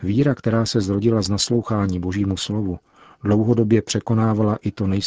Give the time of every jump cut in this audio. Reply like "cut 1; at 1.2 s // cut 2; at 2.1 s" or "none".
none